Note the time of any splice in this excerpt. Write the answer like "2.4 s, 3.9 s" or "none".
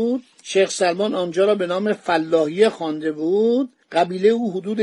3.8 s